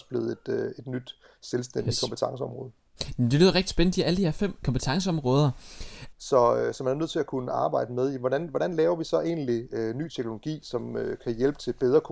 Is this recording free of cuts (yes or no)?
no